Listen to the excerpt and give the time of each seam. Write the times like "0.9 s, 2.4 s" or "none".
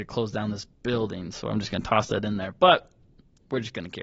none